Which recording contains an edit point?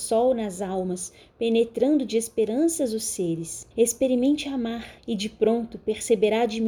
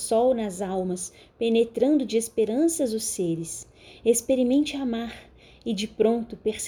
first; 2 cuts; at 3.7 s, 5.0 s

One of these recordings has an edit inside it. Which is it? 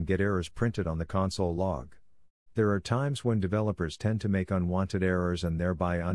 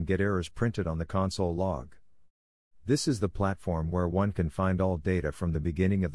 first; 1 cut; at 2.5 s

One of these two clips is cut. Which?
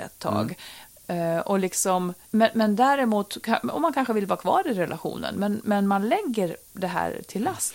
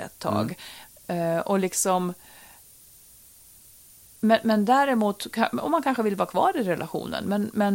first; 1 cut; at 2.2 s

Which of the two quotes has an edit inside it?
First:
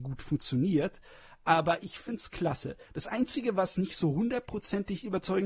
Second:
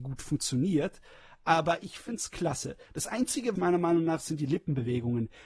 second; 1 cut; at 3.6 s

